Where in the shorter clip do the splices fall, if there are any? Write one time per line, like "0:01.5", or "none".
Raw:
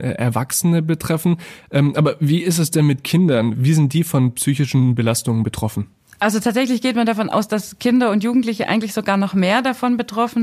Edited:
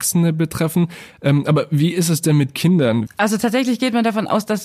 0:03.1

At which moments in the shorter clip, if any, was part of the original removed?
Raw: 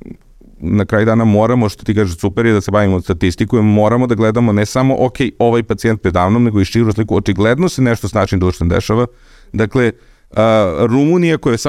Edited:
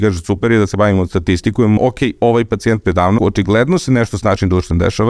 0:01.8
0:03.2

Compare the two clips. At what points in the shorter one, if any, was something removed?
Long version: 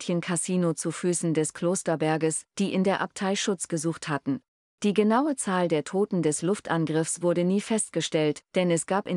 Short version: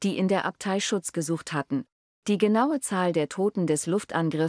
none

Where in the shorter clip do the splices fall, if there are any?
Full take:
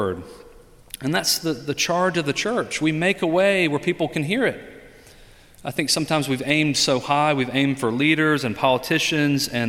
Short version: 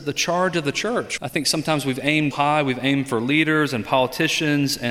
0:01.2
0:02.3

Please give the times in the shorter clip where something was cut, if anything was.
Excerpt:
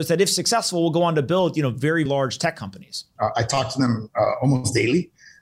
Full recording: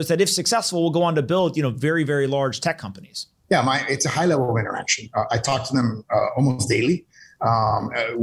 0:02.1
0:03.2

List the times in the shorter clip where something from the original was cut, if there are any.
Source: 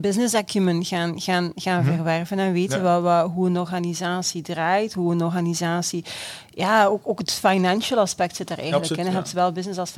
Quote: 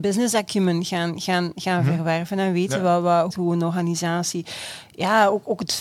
0:03.3

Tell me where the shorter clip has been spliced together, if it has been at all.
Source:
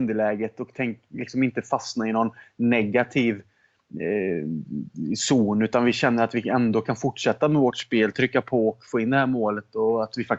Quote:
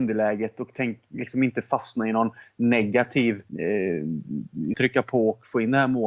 0:03.5
0:04.7

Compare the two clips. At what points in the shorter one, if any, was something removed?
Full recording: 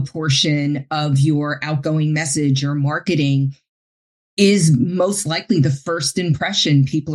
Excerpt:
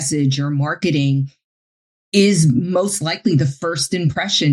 none

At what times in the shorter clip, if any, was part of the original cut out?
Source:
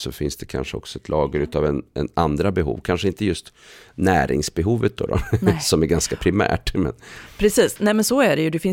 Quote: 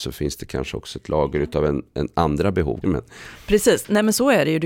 0:02.8

